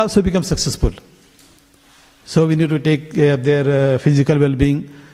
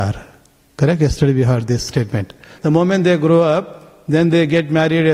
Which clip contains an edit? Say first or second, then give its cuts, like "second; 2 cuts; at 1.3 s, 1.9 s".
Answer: second; 1 cut; at 2.6 s